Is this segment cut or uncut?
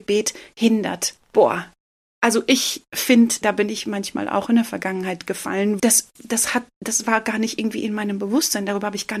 cut